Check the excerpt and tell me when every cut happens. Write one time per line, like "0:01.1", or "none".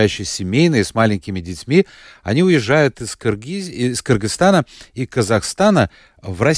none